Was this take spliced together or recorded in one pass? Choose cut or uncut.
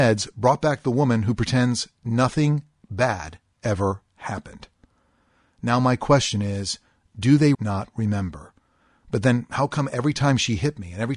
cut